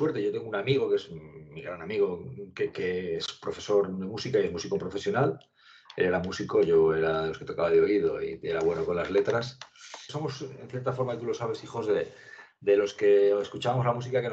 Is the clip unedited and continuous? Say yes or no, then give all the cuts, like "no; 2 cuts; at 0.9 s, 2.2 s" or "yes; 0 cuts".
no; 1 cut; at 10.1 s